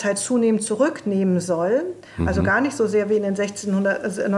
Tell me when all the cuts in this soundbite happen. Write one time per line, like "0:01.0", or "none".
none